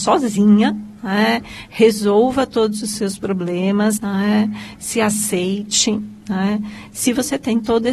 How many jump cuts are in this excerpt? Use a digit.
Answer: 1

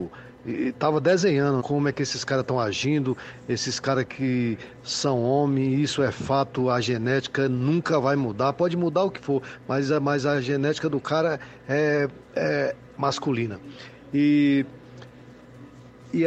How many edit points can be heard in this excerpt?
1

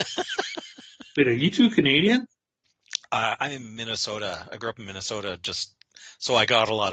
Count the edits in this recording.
0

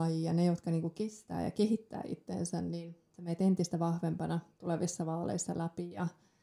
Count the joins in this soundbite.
0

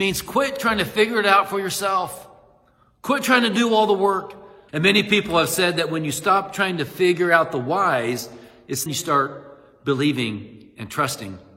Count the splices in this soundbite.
2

